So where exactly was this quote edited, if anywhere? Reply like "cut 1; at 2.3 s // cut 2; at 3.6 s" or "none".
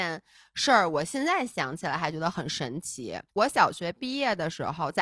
cut 1; at 3.3 s